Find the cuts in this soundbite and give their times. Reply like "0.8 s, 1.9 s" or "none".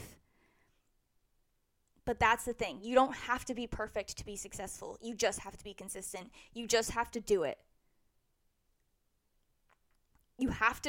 none